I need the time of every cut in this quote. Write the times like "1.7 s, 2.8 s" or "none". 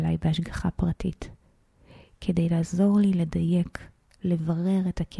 none